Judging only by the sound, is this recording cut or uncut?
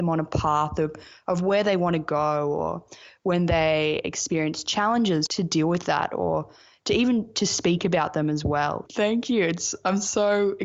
cut